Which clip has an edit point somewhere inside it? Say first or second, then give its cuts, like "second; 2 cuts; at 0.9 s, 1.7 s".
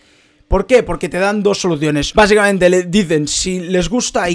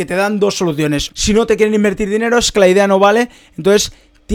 second; 1 cut; at 1.1 s